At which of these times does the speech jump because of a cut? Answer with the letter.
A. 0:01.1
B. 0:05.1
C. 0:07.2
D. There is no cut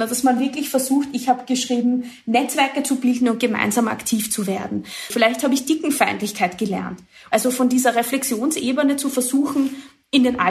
B